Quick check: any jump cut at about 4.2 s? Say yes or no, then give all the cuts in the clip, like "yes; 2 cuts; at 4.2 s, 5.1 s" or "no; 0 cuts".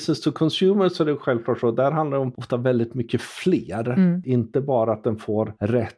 yes; 1 cut; at 4.2 s